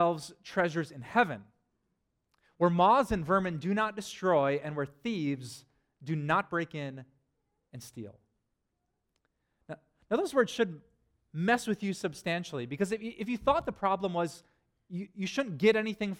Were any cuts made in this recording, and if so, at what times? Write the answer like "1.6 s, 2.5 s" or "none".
none